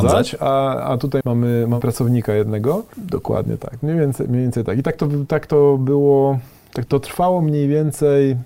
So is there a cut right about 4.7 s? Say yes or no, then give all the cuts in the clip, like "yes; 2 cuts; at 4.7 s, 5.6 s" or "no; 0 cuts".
no; 3 cuts; at 1.2 s, 2.9 s, 6.9 s